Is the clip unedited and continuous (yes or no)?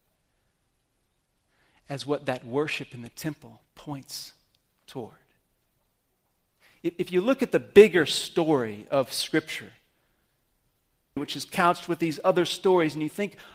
no